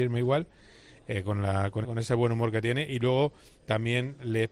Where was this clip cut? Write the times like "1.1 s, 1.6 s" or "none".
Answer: 1.8 s